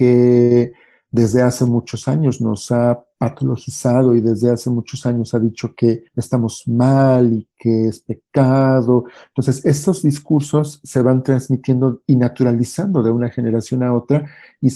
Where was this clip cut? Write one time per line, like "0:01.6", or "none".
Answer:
0:06.1